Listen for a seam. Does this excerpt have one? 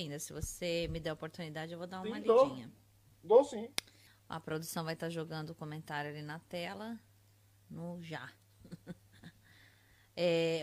yes; 1 cut; at 4.1 s

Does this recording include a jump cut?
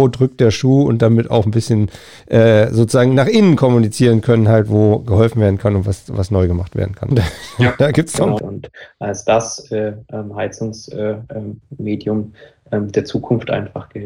yes; 2 cuts; at 7.1 s, 8.4 s

